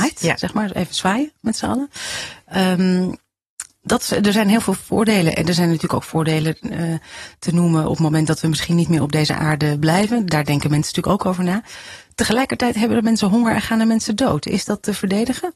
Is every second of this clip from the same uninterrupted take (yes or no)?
yes